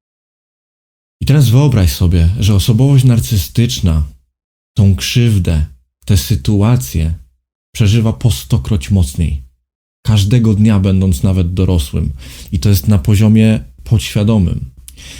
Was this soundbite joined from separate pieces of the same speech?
no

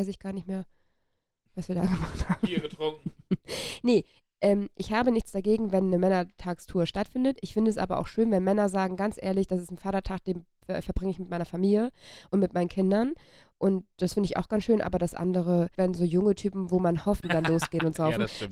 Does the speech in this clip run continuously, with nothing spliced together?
no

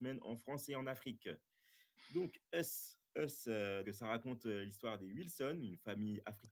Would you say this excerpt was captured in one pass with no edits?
no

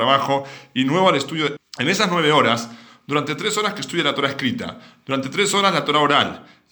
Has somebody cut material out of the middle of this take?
yes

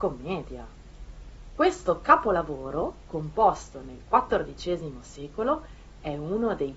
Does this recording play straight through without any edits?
yes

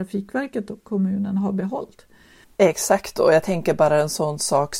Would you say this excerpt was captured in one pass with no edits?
no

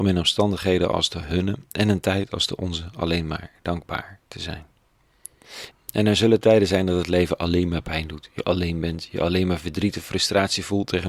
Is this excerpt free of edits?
no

